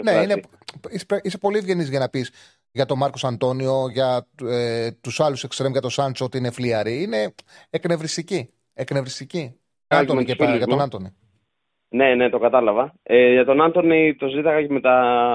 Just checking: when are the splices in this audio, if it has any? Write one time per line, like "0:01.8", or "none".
0:09.9